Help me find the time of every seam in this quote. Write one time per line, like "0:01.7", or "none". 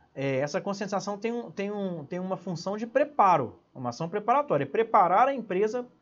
none